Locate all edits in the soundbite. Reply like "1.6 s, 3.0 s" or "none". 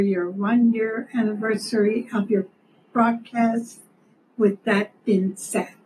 none